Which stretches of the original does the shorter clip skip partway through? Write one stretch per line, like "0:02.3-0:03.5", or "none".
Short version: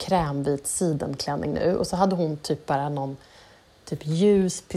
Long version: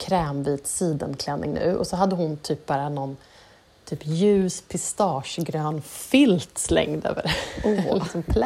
none